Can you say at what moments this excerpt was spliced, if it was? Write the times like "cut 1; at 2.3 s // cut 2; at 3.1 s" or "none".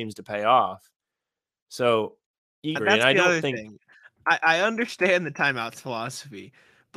cut 1; at 2.8 s